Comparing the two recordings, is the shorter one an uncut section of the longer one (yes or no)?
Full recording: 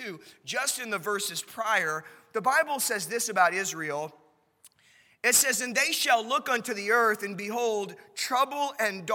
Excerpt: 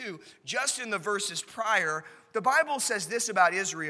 yes